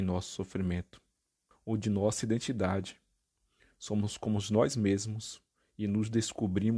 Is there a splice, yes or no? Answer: yes